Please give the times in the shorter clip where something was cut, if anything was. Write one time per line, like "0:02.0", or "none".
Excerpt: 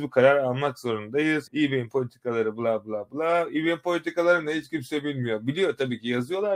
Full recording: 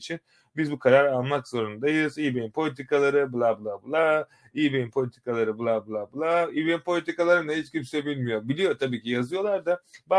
0:01.5